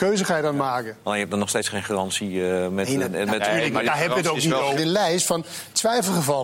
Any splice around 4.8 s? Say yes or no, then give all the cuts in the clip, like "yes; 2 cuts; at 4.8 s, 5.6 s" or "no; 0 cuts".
yes; 1 cut; at 4.8 s